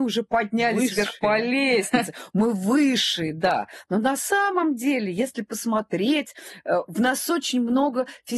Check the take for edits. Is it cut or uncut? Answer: uncut